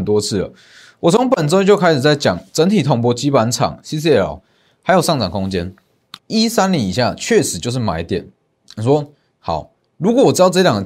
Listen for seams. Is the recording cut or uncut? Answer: cut